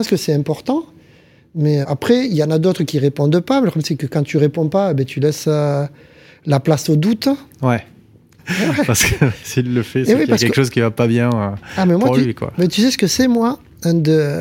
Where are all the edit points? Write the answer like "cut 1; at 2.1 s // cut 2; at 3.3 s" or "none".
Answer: cut 1; at 1.8 s // cut 2; at 8.4 s